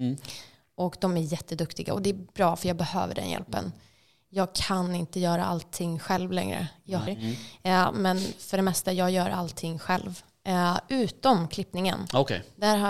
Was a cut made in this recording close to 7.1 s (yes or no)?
yes